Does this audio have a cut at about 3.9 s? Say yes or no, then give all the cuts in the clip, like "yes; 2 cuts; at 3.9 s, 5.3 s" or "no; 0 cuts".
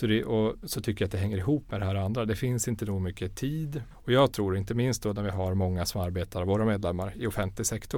yes; 1 cut; at 3.9 s